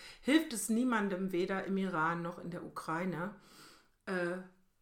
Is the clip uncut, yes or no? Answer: yes